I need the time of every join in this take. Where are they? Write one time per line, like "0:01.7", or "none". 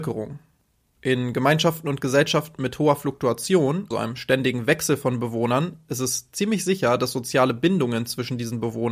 0:03.9

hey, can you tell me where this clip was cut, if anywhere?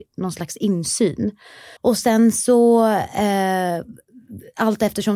0:01.8

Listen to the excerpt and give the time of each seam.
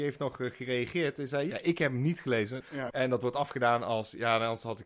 0:01.5
0:02.9

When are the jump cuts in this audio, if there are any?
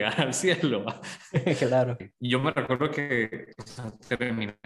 0:02.0

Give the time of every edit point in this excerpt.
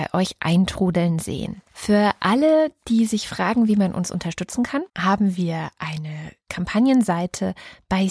0:01.7
0:04.9

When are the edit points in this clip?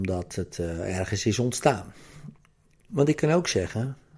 0:02.9

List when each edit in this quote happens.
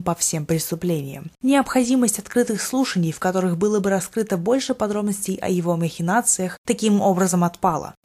none

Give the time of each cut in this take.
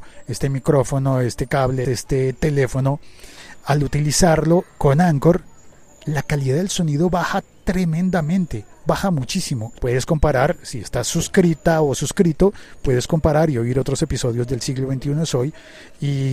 0:01.8
0:09.8

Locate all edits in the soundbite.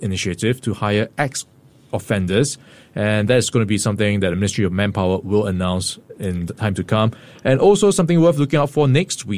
none

